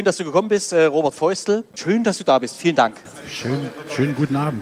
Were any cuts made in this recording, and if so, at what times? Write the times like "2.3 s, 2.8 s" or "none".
none